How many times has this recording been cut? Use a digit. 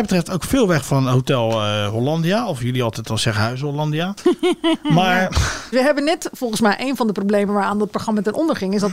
1